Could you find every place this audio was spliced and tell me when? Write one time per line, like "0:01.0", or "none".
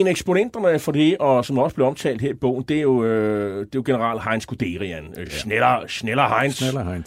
none